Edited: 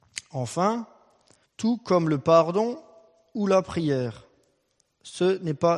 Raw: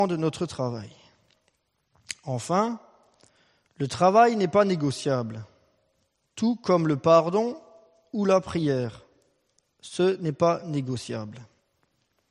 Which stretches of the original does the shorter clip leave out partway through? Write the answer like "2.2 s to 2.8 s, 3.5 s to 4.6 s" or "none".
3.4 s to 6.2 s